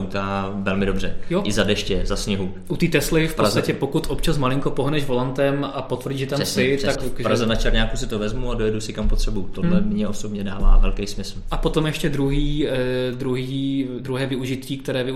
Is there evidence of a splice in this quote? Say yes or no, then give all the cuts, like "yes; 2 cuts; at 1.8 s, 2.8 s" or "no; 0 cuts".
yes; 1 cut; at 6.9 s